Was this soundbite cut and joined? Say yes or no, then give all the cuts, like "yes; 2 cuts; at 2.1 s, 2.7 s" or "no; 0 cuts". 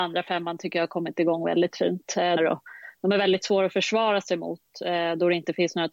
yes; 1 cut; at 2.4 s